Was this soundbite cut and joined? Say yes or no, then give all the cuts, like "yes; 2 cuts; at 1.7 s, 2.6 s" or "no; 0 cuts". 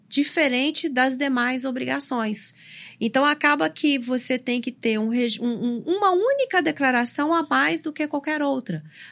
yes; 1 cut; at 5.8 s